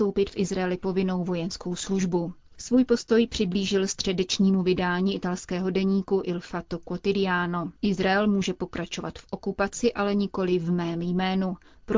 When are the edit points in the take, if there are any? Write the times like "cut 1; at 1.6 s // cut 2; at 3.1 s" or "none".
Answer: cut 1; at 7.8 s